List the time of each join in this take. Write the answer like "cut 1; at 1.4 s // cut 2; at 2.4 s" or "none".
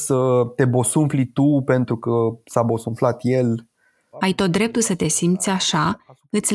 cut 1; at 4.1 s